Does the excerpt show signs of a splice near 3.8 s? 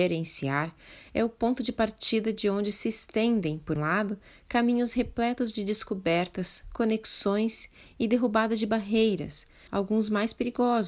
yes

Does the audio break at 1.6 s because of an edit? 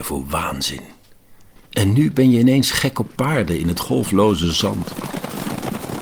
yes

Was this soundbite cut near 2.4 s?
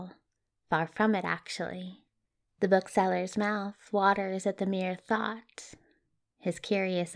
yes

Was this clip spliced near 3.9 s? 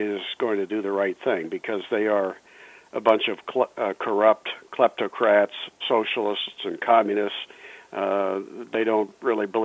no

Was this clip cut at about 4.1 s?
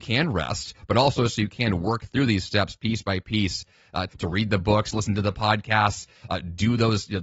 yes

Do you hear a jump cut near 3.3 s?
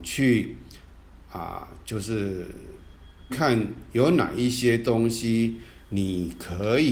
yes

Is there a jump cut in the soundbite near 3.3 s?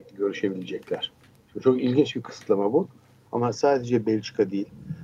yes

